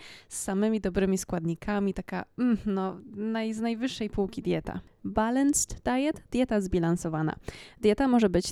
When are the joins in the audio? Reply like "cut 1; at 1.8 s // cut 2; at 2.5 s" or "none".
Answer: cut 1; at 5.0 s